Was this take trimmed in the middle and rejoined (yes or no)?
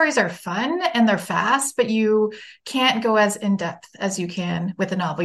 no